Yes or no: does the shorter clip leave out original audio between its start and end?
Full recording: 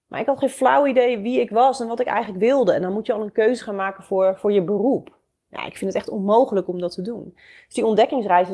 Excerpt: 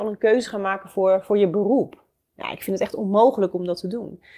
no